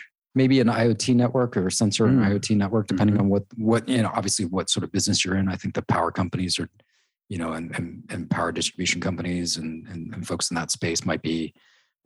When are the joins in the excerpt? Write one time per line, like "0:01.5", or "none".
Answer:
none